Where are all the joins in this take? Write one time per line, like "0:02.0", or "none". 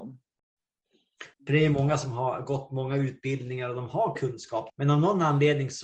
0:01.3
0:04.7